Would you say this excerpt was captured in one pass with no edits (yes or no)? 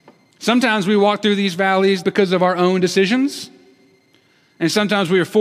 no